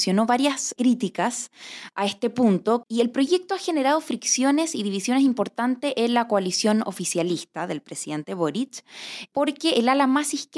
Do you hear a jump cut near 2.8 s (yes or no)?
yes